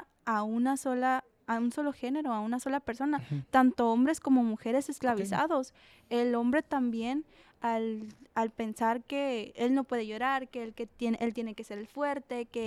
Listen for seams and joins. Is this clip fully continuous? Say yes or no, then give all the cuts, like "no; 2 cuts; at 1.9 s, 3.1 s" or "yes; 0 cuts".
yes; 0 cuts